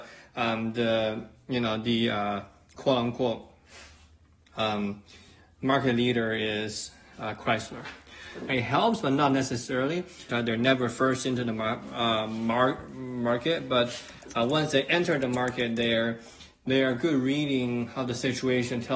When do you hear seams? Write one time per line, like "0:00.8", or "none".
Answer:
0:08.5
0:10.3